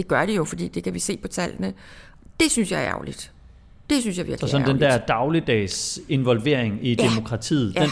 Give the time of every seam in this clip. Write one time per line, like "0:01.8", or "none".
none